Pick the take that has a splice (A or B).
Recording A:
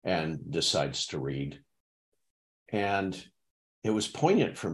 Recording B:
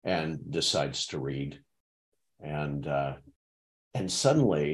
B